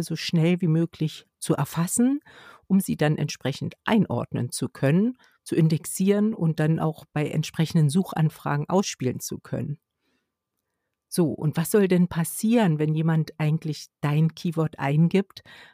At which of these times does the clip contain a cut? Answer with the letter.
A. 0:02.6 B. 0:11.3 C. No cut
C